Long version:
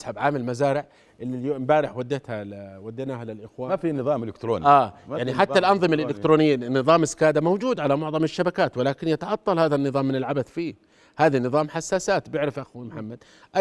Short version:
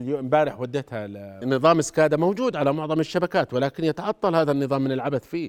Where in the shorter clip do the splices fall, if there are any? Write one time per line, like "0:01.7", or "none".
0:01.4